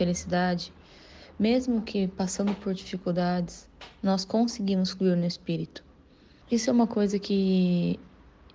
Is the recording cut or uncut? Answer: cut